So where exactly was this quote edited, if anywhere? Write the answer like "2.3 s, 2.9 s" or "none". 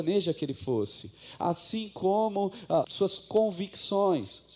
2.8 s